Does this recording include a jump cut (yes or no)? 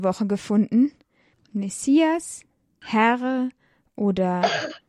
yes